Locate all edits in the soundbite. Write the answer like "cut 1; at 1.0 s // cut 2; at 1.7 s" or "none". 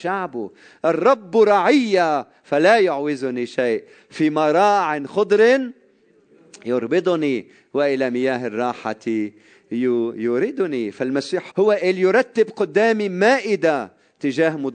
cut 1; at 11.5 s

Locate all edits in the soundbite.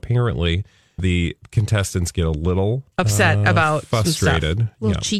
cut 1; at 1.0 s // cut 2; at 2.9 s

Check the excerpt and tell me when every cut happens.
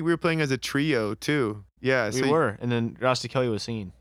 cut 1; at 1.8 s

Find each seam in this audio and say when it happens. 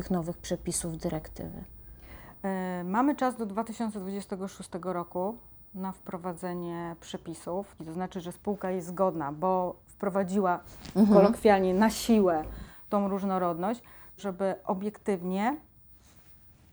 cut 1; at 7.8 s // cut 2; at 14.2 s

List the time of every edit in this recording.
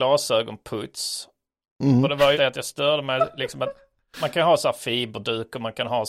cut 1; at 2.3 s

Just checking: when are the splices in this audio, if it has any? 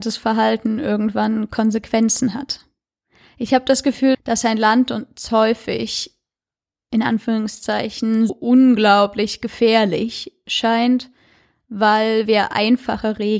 cut 1; at 4.1 s // cut 2; at 8.3 s

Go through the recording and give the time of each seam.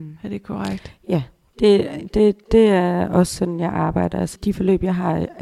cut 1; at 2.4 s // cut 2; at 4.4 s

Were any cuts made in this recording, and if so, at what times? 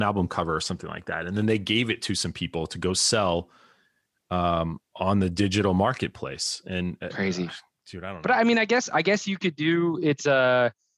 none

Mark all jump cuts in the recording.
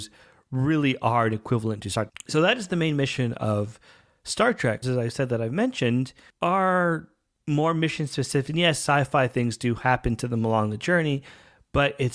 cut 1; at 2.1 s // cut 2; at 4.8 s // cut 3; at 8.5 s

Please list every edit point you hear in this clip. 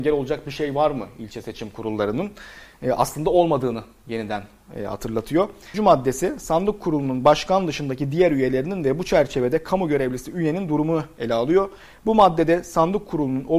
cut 1; at 5.7 s

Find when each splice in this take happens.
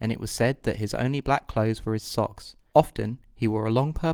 cut 1; at 2.7 s

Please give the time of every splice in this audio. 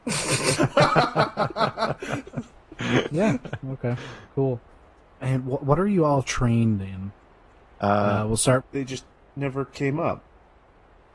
cut 1; at 8.6 s

